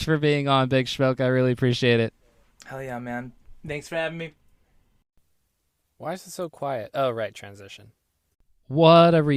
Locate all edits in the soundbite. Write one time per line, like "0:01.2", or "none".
none